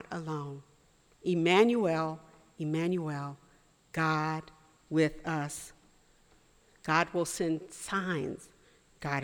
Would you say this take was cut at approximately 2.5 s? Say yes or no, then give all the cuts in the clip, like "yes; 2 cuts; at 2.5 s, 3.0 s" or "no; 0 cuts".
no; 1 cut; at 6.8 s